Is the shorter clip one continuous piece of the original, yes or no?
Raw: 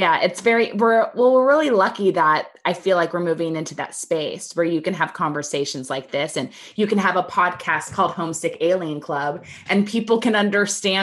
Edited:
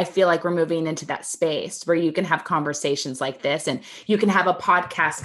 yes